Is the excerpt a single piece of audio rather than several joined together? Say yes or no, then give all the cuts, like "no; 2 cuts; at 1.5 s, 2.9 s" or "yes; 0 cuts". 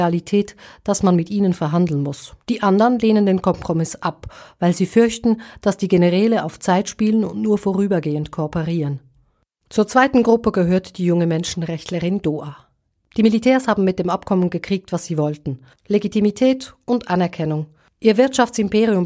no; 1 cut; at 2.4 s